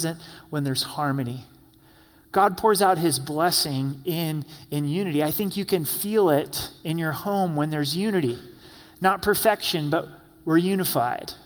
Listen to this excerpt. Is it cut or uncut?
uncut